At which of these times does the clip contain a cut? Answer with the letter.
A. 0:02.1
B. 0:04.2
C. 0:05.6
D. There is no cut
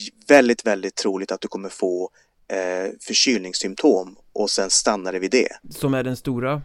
C